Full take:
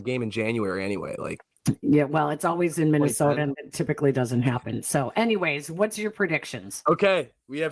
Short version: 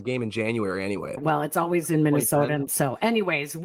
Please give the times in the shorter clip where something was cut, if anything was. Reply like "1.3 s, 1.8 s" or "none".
1.2 s, 2.7 s